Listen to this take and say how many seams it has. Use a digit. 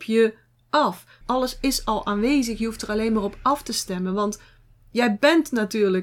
1